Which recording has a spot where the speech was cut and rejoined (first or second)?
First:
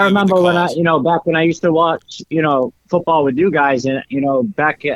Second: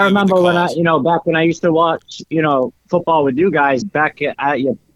second